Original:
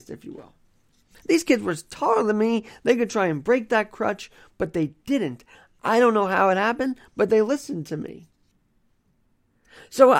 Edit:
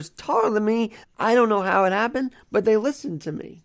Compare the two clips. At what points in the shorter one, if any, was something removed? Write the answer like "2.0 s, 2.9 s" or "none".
1.0 s

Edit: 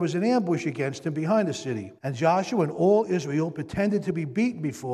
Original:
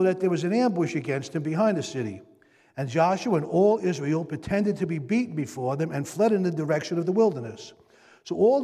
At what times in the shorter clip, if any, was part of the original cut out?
2.0 s

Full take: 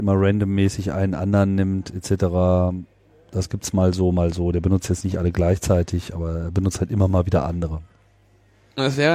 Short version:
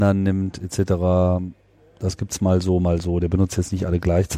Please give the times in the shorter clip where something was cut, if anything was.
none

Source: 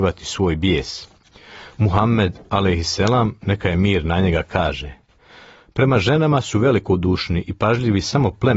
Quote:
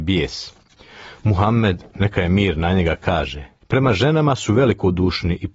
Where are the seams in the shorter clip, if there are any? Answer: 1.9 s, 3.6 s

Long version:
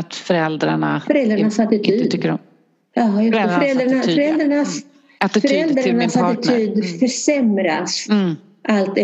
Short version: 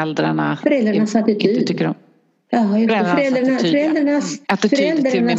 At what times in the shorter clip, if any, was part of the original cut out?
4.4 s

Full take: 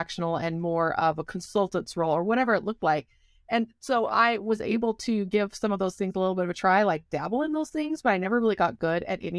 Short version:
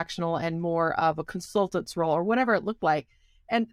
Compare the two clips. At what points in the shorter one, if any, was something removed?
none

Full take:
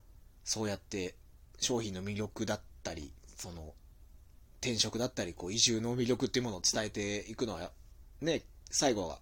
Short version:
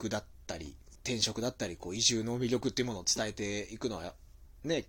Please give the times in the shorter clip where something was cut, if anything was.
1.0 s

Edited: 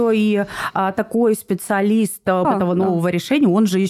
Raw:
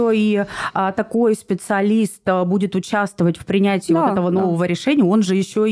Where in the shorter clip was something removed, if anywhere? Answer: 2.4 s

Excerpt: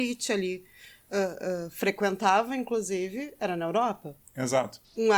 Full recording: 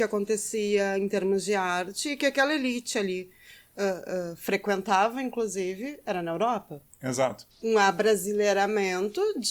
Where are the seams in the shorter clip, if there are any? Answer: none

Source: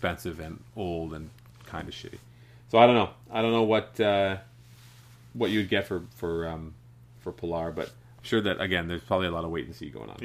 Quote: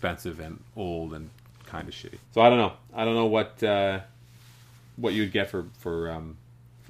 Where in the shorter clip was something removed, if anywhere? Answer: 2.3 s

